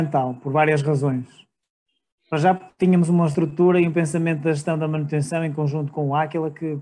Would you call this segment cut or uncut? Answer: uncut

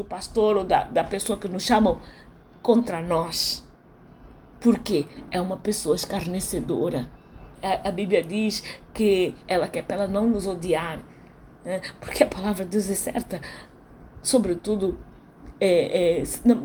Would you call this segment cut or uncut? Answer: cut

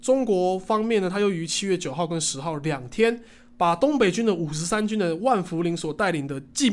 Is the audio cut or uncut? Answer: uncut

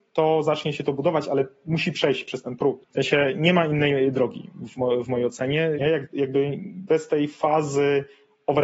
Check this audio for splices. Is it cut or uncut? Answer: cut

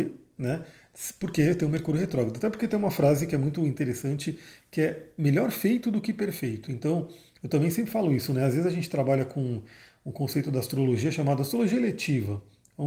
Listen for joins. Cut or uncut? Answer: uncut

